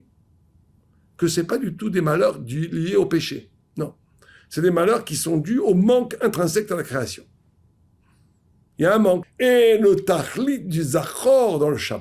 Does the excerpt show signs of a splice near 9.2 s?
yes; 1 cut; at 9.2 s

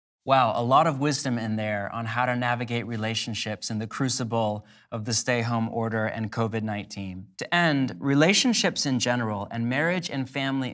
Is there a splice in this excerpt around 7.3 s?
yes; 1 cut; at 7.3 s

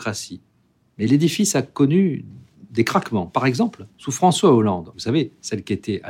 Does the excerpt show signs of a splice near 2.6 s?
no; 2 cuts; at 3.9 s, 4.9 s

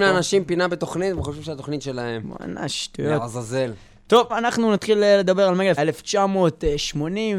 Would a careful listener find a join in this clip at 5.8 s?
yes; 2 cuts; at 4.3 s, 5.8 s

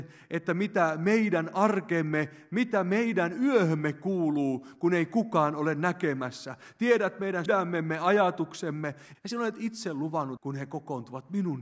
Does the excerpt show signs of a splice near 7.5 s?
yes; 3 cuts; at 7.5 s, 9.1 s, 10.4 s

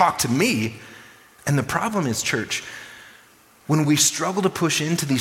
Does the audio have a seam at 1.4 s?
yes; 1 cut; at 1.4 s

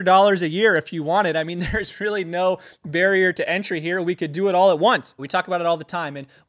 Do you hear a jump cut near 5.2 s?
yes; 1 cut; at 5.2 s

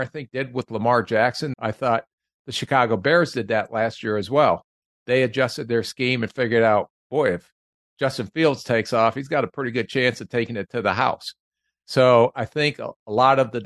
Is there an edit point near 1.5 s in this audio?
yes; 1 cut; at 1.5 s

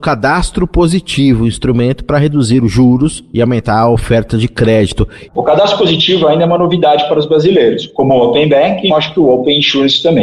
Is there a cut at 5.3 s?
yes; 2 cuts; at 5.3 s, 8.9 s

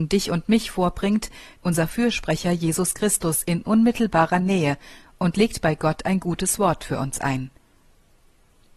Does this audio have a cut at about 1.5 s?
yes; 1 cut; at 1.5 s

